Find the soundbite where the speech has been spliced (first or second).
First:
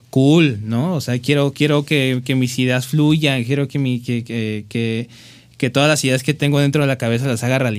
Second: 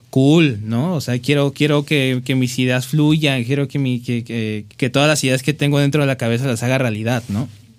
second